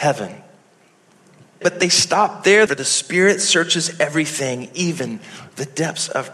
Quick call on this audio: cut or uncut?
cut